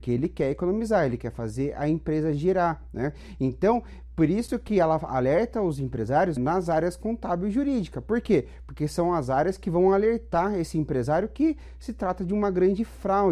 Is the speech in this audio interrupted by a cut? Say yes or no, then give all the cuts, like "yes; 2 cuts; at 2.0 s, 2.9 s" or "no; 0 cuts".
yes; 1 cut; at 6.4 s